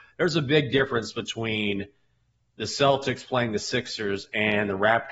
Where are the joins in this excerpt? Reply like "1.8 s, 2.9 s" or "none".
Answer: none